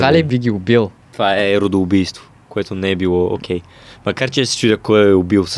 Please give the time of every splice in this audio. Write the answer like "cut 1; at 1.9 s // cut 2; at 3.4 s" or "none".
cut 1; at 1.0 s